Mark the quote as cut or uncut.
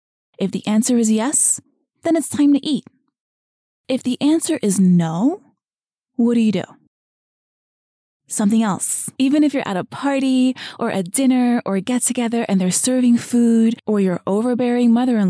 cut